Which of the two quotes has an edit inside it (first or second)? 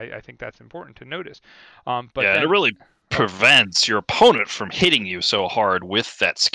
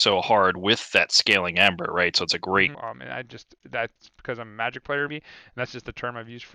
second